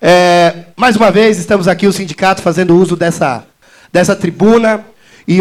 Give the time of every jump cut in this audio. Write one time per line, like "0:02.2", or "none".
none